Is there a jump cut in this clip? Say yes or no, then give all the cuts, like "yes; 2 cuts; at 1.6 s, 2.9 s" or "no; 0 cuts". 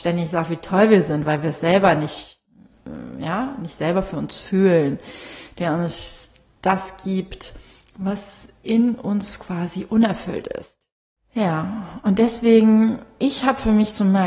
no; 0 cuts